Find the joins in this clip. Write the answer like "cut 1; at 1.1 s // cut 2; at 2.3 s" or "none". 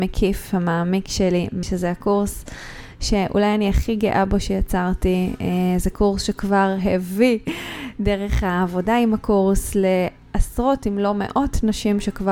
cut 1; at 1.6 s